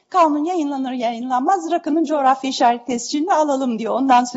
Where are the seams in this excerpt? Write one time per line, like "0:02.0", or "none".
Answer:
none